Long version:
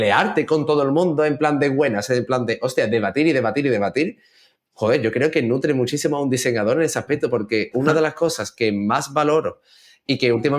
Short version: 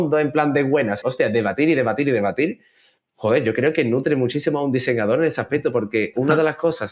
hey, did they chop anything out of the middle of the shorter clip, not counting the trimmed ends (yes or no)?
yes